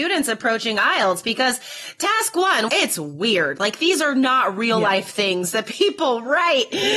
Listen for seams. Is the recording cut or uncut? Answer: cut